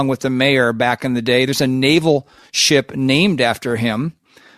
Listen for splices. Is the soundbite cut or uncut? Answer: uncut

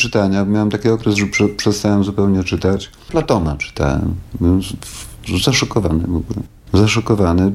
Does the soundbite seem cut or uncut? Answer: uncut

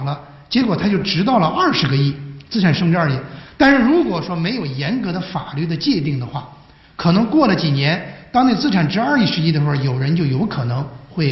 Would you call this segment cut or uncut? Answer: uncut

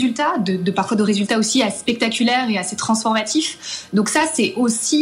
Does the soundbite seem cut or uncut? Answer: uncut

